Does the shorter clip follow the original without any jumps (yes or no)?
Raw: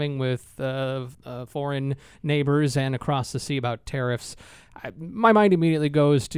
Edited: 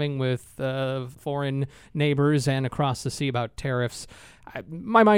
no